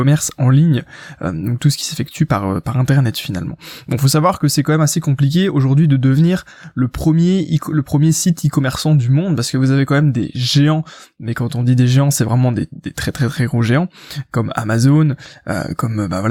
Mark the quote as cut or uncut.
uncut